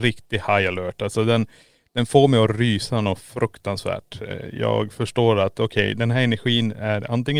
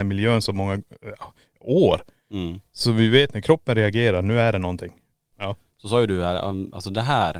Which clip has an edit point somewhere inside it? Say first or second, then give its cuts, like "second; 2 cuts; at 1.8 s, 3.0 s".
second; 1 cut; at 5.3 s